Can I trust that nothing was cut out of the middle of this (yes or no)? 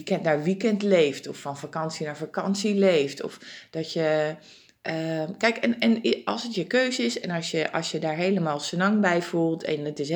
yes